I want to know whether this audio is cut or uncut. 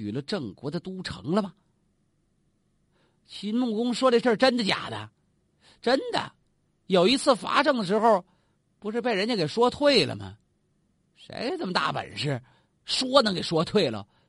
uncut